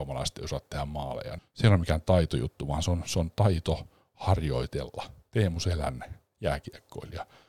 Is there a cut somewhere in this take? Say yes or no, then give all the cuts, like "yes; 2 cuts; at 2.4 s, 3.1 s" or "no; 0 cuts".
yes; 1 cut; at 1.4 s